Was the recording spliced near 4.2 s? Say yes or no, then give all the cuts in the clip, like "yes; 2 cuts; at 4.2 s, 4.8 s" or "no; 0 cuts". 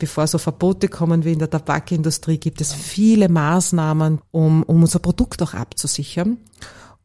yes; 1 cut; at 4.2 s